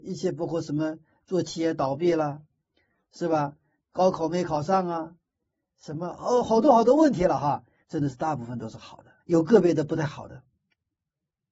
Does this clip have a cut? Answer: yes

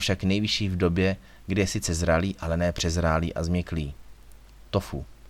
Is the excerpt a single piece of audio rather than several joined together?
yes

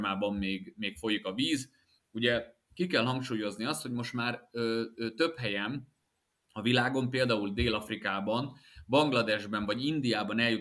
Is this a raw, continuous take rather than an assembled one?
yes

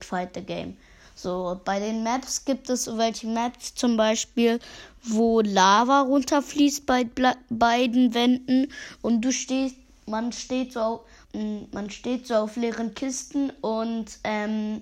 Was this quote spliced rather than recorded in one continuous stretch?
yes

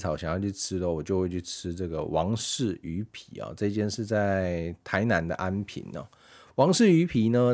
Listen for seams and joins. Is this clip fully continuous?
yes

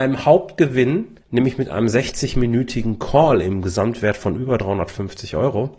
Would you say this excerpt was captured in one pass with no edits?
no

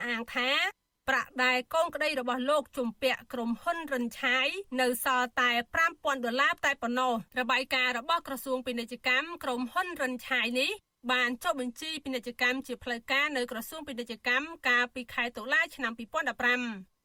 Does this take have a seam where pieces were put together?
yes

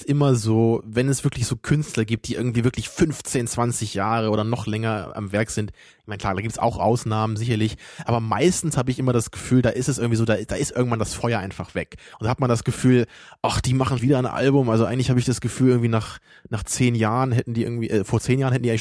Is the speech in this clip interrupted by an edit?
yes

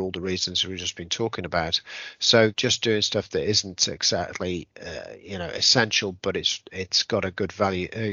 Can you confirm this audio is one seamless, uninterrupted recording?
no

